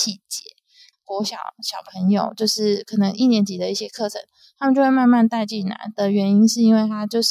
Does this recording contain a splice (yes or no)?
yes